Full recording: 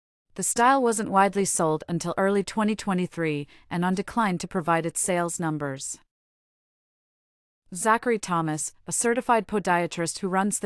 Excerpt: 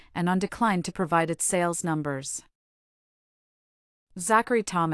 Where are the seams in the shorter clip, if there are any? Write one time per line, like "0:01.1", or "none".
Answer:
none

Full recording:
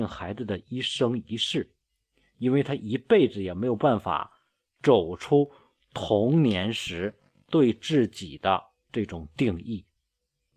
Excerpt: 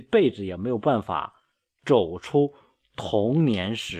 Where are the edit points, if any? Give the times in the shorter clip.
none

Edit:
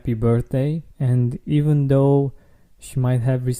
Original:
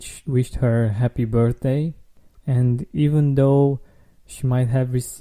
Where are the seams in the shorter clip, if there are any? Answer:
0:00.9

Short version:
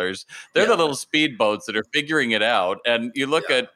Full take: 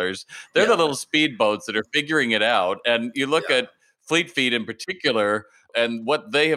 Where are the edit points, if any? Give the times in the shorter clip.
none

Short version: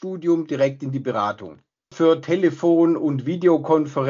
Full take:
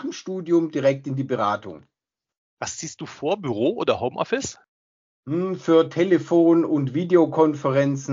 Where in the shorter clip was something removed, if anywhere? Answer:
0:01.9

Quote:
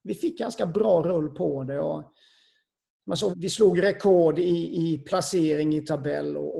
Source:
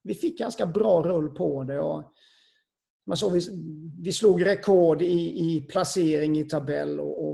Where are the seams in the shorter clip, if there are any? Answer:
0:03.3

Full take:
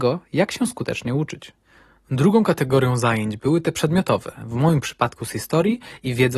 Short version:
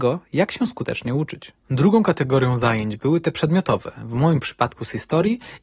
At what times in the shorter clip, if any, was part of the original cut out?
0:01.6

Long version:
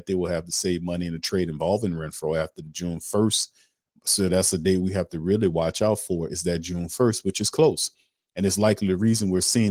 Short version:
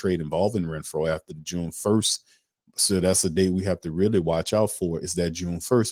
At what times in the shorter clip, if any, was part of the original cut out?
none

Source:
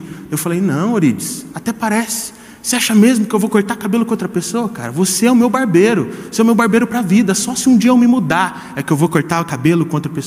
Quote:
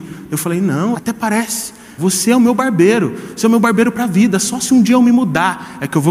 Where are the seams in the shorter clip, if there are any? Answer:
0:00.9
0:02.0

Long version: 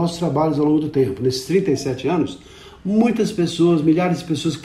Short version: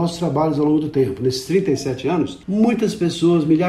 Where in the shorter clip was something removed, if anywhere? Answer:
0:02.4

